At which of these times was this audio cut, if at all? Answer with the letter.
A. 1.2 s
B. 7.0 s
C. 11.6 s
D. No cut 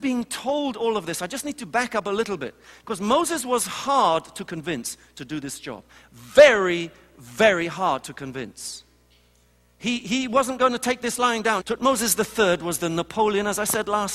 C